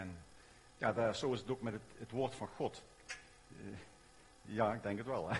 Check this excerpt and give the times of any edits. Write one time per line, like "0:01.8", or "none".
0:03.4